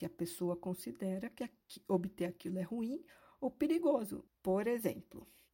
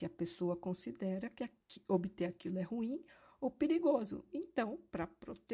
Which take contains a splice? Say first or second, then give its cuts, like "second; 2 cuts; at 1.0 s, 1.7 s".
first; 1 cut; at 4.3 s